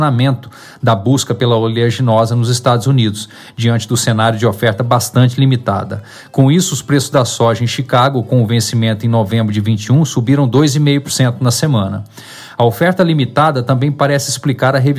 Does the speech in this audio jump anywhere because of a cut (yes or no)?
no